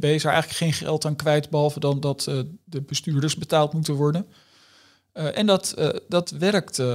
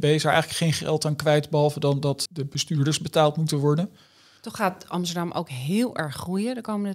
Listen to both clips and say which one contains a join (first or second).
second